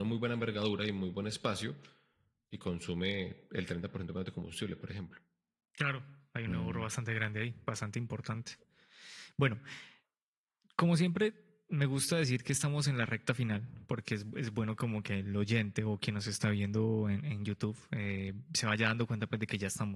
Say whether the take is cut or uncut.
uncut